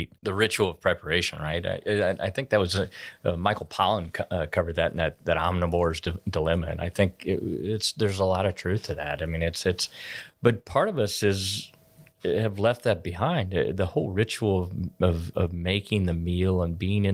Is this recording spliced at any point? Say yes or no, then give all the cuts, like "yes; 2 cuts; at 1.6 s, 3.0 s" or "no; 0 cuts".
no; 0 cuts